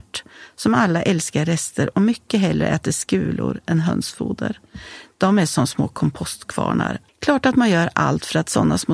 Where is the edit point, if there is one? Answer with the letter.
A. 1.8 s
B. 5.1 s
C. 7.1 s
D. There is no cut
C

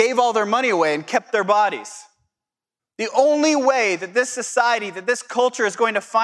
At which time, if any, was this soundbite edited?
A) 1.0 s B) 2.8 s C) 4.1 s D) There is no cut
B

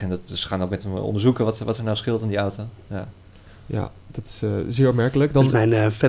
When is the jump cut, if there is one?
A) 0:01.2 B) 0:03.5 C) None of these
C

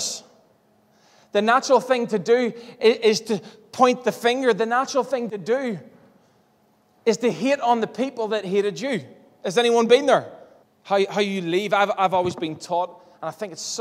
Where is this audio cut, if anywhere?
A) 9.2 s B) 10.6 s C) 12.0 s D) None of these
B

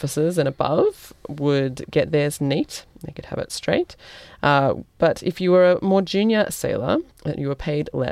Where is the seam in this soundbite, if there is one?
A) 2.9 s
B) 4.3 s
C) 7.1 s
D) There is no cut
C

